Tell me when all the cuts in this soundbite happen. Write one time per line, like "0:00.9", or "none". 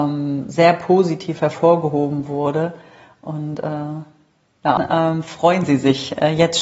0:04.8